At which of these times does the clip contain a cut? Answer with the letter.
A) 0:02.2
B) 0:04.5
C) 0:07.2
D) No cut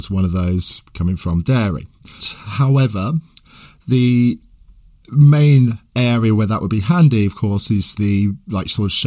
A